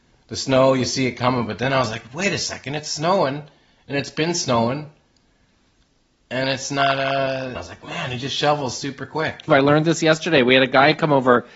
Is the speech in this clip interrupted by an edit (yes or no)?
yes